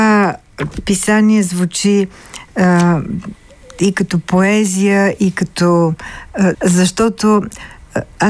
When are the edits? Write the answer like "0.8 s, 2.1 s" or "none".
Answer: 6.5 s